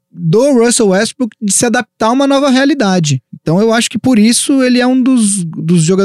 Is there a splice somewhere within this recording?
yes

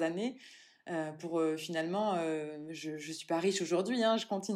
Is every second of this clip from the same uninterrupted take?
yes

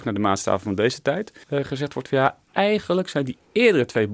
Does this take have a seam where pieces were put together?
yes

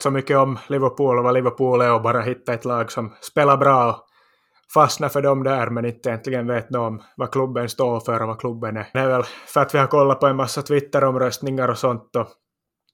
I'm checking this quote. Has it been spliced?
yes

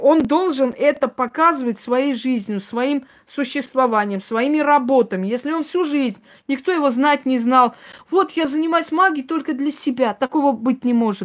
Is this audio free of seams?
yes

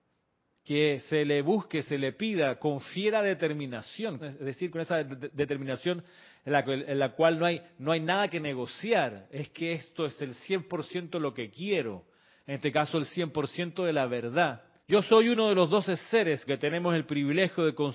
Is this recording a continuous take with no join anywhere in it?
no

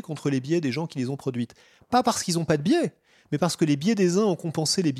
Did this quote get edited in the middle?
no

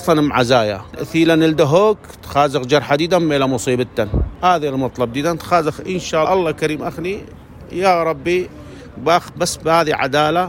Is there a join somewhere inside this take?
yes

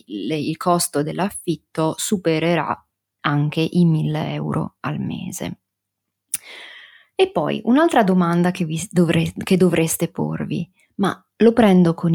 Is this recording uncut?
yes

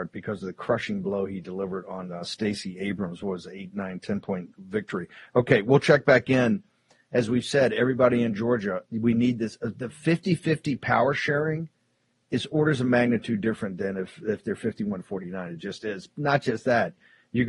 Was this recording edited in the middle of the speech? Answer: no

